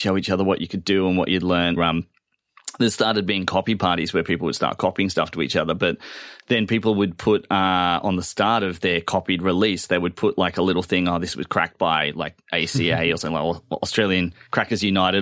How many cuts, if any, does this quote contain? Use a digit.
1